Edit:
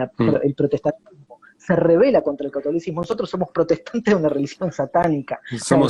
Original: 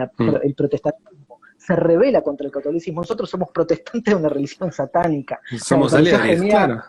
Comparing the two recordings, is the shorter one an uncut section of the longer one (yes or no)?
yes